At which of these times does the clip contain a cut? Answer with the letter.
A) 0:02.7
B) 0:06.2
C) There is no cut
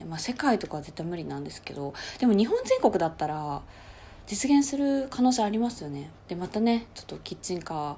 B